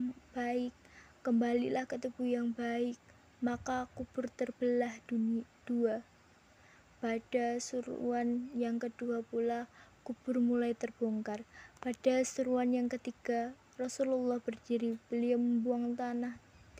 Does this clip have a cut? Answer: no; 0 cuts

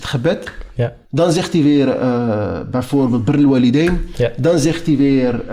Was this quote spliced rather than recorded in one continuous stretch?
yes; 1 cut; at 1.0 s

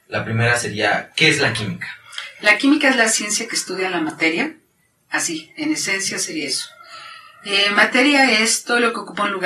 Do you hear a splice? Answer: no; 0 cuts

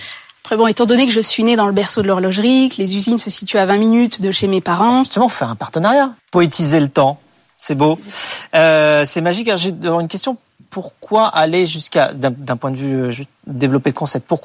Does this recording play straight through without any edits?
no; 2 cuts; at 6.2 s, 13.1 s

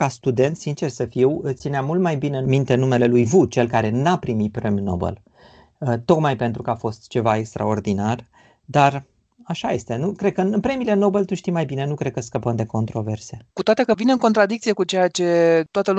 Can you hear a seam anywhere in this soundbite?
yes; 1 cut; at 13.5 s

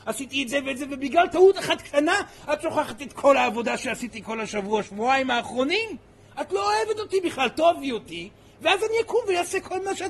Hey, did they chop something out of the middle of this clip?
no; 0 cuts

